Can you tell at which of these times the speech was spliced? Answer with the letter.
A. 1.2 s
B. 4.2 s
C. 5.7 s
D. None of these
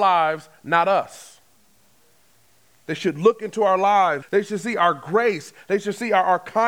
B